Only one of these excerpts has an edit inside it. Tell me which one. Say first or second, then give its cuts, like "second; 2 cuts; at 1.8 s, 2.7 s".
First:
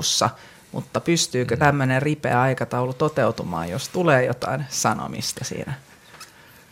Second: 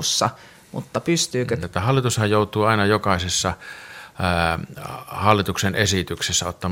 second; 1 cut; at 1.6 s